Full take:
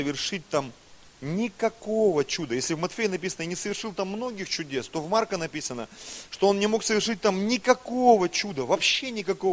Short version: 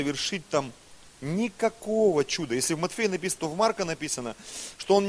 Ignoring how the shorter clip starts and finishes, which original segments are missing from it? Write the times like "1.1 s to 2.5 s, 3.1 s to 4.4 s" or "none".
3.4 s to 4.9 s